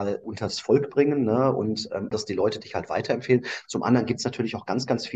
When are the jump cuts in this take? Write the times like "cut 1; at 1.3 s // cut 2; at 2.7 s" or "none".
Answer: cut 1; at 2.1 s